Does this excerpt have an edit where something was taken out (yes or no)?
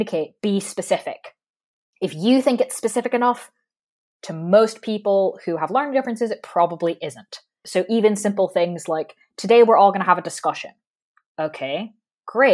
no